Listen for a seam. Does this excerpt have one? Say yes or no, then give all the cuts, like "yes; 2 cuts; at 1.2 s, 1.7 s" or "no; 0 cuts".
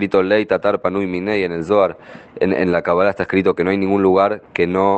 no; 0 cuts